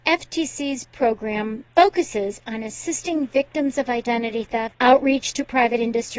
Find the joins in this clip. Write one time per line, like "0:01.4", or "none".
0:04.7